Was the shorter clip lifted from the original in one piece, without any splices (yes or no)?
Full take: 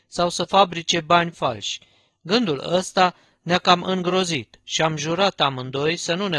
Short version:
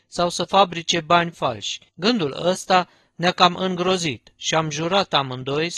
no